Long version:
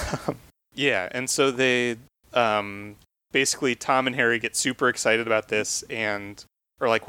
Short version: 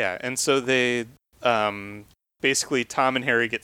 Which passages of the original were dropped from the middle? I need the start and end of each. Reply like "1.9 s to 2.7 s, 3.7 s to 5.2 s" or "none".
none